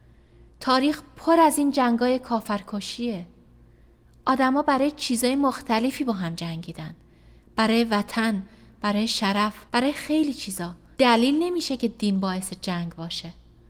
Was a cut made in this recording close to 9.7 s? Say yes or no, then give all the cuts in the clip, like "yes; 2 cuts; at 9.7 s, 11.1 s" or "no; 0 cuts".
yes; 2 cuts; at 9.7 s, 10.9 s